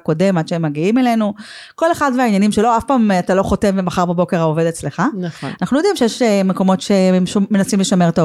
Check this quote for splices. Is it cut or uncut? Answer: cut